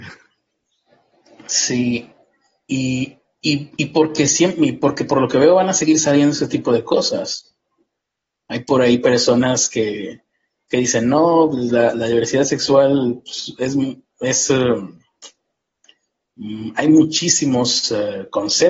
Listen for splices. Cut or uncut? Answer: uncut